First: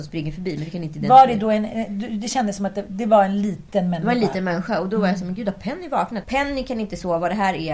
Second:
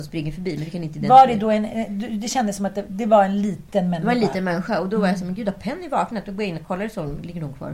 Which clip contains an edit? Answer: first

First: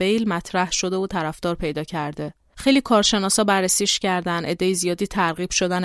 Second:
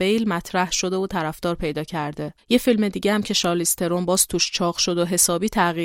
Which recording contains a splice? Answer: second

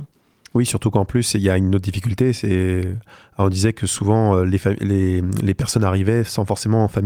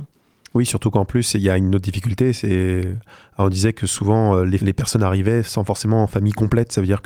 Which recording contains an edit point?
second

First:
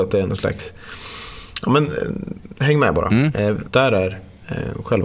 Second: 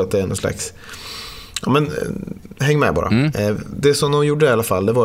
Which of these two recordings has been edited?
first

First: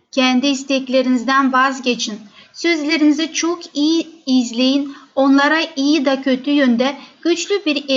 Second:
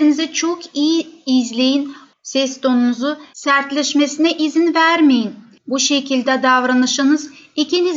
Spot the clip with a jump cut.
second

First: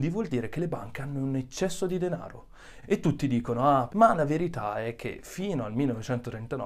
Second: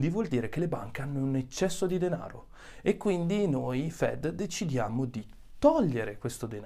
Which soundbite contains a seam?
first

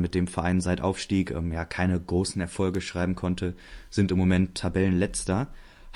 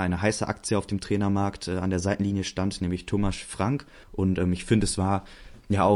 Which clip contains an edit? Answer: second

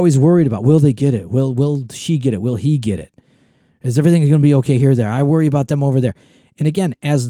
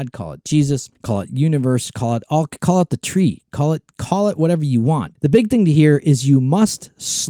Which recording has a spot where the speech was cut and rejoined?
second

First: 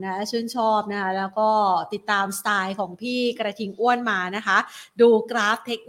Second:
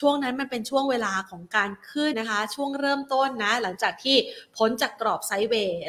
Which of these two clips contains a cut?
second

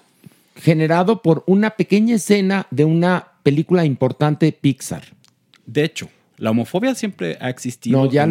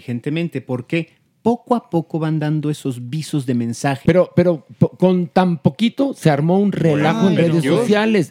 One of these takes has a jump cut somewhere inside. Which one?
second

